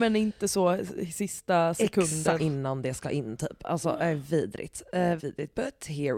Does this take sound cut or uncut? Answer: cut